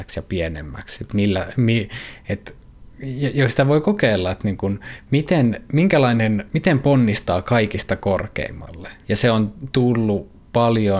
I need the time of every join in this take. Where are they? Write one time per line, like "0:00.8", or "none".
0:09.0

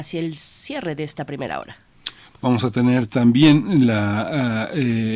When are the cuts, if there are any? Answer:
none

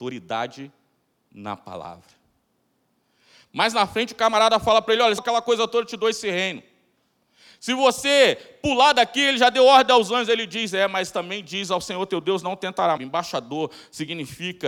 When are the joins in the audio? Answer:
0:05.2
0:13.0

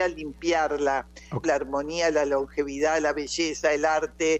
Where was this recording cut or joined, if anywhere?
0:01.4

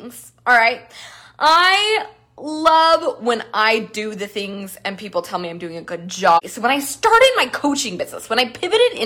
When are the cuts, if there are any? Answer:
0:06.4

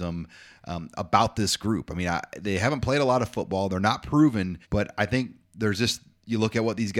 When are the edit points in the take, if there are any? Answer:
0:04.6

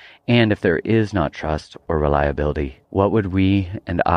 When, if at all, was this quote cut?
0:02.8

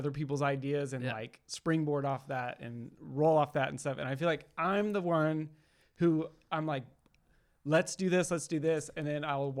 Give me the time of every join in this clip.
none

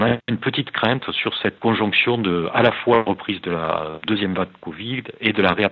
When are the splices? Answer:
0:01.6

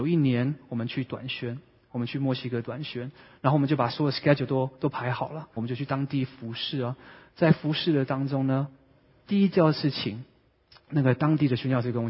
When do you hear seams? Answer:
0:05.6

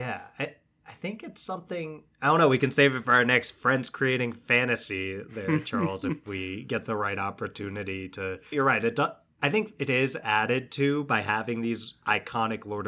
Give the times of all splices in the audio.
0:08.5

